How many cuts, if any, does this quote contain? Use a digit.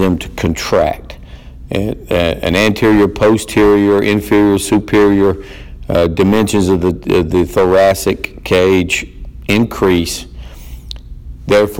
1